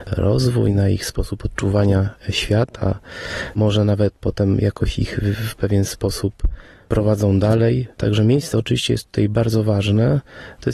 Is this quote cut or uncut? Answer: uncut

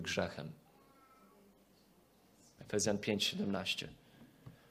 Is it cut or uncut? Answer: cut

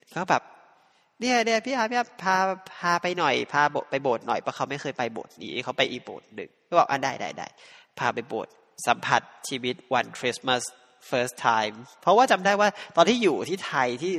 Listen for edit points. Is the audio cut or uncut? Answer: uncut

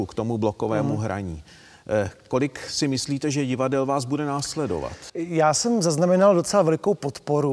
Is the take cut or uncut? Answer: uncut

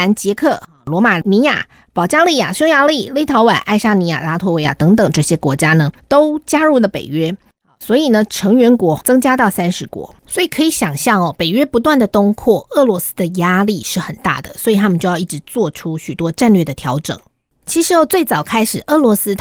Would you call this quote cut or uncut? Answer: uncut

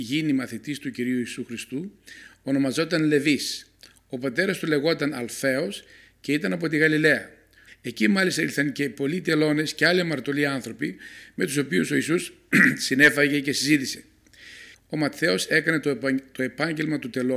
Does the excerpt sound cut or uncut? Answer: cut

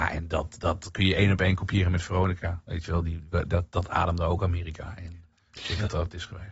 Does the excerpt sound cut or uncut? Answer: uncut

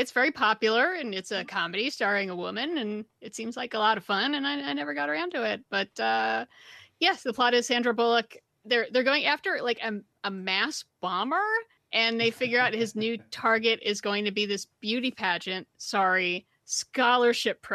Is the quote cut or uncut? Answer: uncut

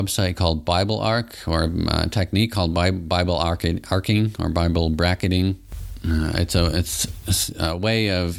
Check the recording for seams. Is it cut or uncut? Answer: uncut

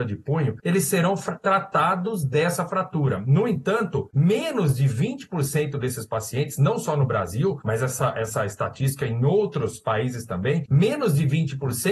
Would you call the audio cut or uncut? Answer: uncut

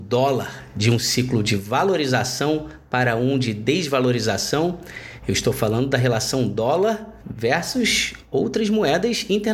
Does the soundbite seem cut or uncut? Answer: cut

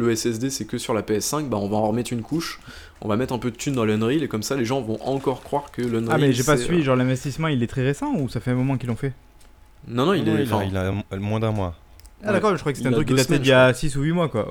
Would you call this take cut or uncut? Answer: uncut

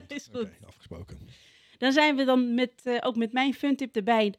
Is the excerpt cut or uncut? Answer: uncut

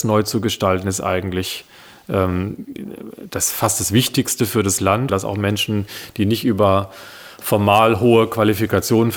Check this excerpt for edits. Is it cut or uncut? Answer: cut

